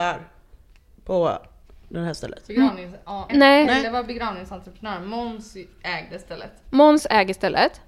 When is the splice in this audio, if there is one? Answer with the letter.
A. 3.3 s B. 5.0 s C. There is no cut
A